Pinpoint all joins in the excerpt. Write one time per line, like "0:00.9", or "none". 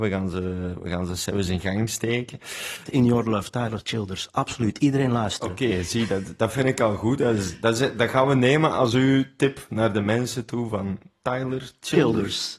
0:02.8